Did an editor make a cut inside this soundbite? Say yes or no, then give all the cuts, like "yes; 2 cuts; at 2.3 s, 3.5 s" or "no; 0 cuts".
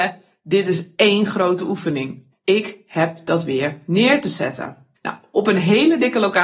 yes; 2 cuts; at 2.3 s, 5.0 s